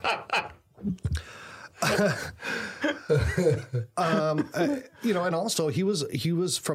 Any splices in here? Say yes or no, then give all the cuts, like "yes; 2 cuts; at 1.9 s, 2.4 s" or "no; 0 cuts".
no; 0 cuts